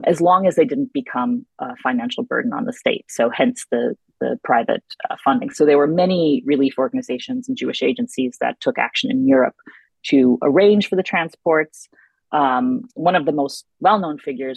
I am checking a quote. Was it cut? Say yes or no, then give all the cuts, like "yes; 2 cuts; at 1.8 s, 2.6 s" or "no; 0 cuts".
no; 0 cuts